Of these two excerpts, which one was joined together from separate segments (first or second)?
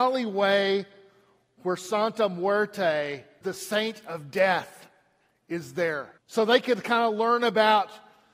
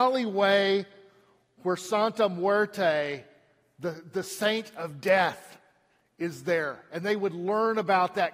first